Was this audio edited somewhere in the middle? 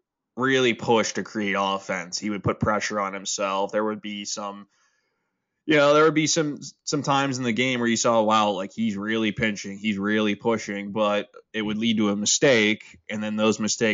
no; 0 cuts

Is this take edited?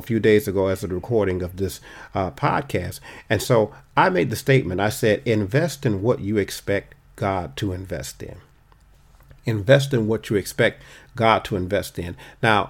no; 0 cuts

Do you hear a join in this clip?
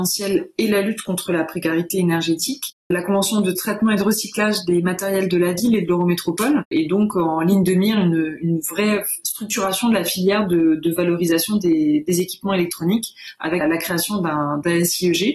yes; 1 cut; at 13.6 s

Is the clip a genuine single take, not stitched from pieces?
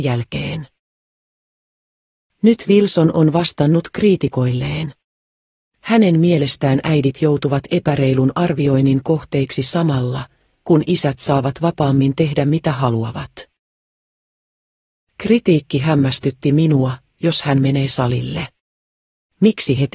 no; 1 cut; at 17.1 s

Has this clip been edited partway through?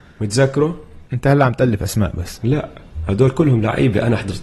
yes; 1 cut; at 1.1 s

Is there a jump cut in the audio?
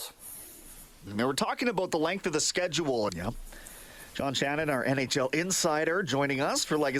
yes; 2 cuts; at 1.1 s, 3.1 s

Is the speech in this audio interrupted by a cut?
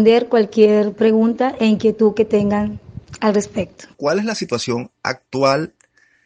yes; 1 cut; at 3.9 s

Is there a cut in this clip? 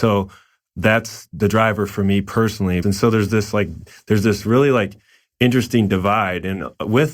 yes; 1 cut; at 2.8 s

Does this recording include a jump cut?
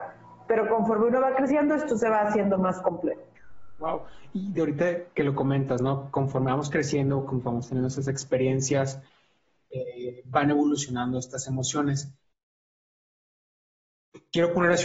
no; 0 cuts

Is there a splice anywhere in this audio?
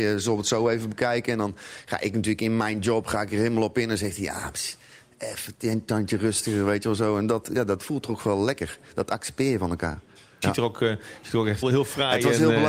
yes; 2 cuts; at 10.4 s, 11.6 s

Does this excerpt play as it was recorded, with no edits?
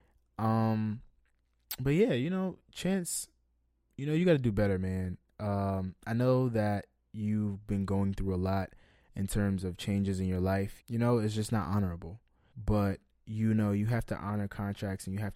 no; 2 cuts; at 10.8 s, 12.5 s

